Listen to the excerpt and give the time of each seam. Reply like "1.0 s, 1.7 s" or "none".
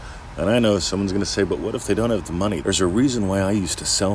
2.6 s